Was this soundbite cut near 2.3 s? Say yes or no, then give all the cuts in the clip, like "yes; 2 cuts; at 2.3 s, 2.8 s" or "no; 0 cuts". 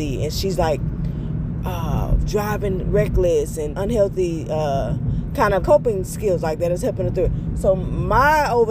no; 2 cuts; at 3.7 s, 5.6 s